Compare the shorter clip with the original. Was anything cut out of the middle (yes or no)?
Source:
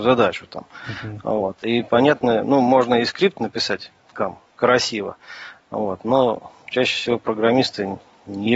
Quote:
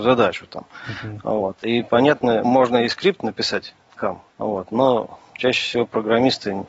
yes